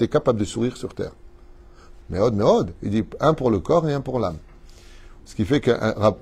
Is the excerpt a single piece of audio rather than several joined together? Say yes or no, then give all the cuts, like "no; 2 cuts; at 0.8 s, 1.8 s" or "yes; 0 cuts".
no; 2 cuts; at 2.0 s, 5.2 s